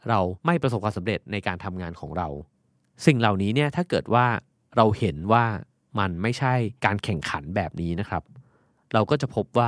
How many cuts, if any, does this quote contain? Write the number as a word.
zero